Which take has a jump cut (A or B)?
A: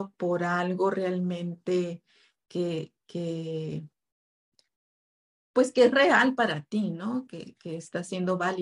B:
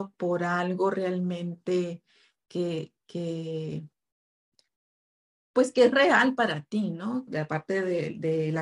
B